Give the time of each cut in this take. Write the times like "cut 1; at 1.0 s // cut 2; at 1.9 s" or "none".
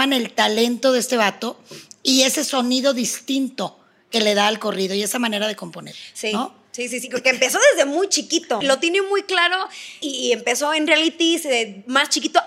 cut 1; at 8.6 s // cut 2; at 10.0 s